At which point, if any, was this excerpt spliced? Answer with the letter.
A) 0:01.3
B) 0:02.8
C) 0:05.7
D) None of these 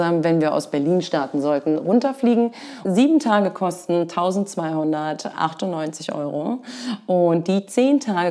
B